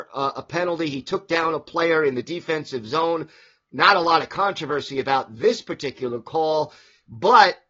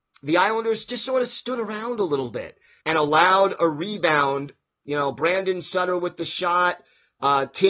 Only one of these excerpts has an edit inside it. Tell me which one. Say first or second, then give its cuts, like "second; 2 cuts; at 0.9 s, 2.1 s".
second; 1 cut; at 2.8 s